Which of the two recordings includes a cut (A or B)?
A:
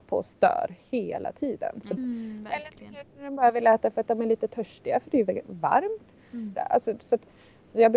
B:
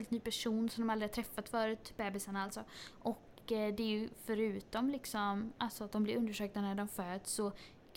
A